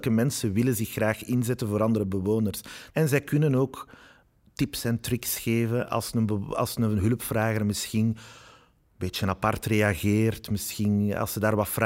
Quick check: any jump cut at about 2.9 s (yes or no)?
yes